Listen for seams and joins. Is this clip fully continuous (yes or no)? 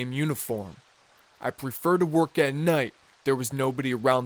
no